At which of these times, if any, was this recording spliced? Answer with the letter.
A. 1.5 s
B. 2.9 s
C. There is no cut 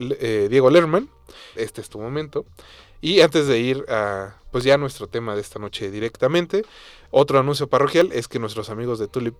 A